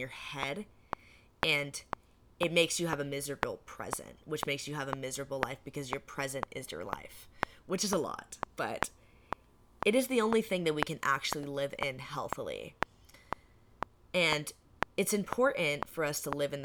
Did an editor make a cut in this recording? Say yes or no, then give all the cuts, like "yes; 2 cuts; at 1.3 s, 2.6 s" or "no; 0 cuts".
yes; 1 cut; at 8.5 s